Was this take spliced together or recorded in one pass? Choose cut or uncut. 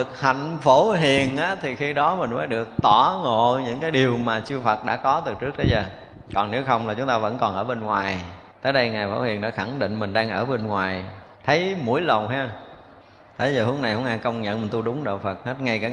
cut